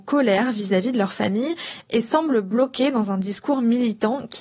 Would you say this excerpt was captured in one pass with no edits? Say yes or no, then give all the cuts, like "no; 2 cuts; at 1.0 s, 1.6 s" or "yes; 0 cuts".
yes; 0 cuts